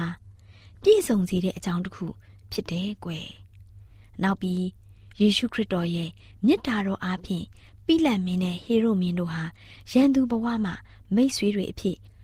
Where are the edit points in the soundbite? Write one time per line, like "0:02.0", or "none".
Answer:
none